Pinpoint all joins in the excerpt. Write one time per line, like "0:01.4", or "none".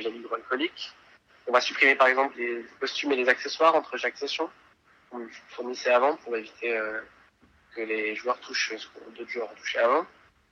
0:02.3